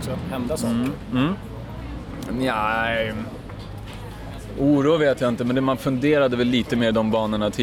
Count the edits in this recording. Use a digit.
0